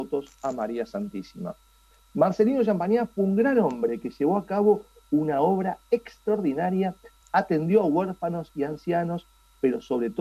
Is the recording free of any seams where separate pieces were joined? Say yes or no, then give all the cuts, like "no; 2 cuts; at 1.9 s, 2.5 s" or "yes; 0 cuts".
no; 1 cut; at 7.2 s